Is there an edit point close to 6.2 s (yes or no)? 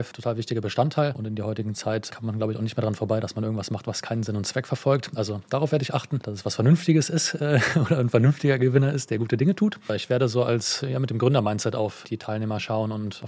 no